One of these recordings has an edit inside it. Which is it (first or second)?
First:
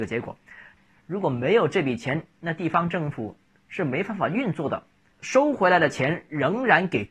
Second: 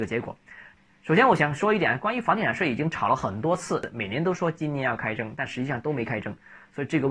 first